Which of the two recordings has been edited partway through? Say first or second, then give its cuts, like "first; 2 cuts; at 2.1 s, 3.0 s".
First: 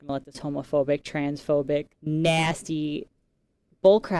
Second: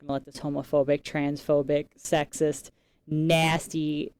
first; 1 cut; at 1.9 s